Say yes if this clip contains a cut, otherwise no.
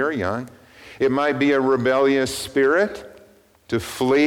no